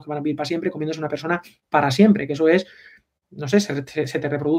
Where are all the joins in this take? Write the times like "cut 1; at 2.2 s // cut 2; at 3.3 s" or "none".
none